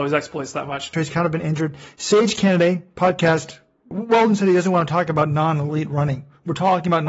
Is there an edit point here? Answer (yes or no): yes